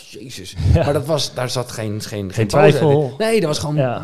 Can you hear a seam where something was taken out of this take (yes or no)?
no